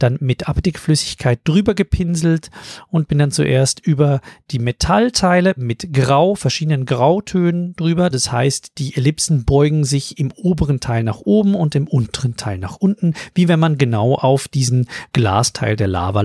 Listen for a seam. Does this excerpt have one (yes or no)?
yes